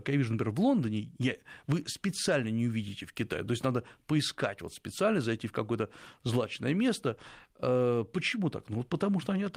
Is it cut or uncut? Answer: uncut